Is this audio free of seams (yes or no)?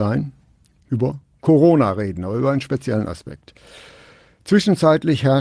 yes